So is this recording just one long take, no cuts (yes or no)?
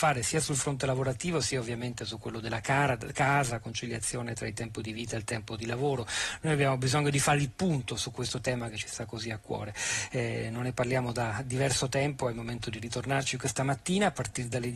yes